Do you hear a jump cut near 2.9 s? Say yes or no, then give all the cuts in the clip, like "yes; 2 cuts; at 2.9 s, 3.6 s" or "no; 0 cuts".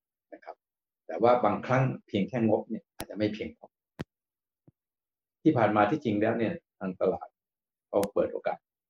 yes; 1 cut; at 2.9 s